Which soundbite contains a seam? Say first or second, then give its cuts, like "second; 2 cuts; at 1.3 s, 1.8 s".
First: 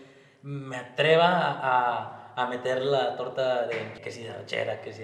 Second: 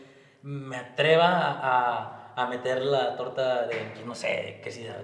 first; 1 cut; at 4.0 s